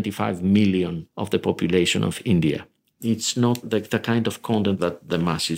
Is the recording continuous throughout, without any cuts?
no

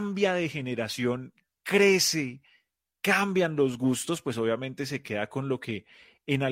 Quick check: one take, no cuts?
yes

